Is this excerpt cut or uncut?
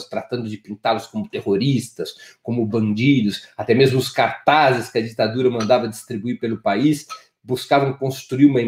uncut